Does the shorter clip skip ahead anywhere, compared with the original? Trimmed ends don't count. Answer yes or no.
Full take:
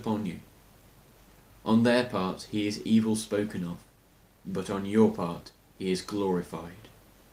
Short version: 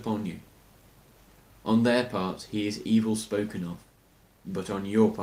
no